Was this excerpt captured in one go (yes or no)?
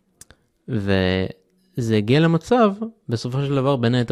yes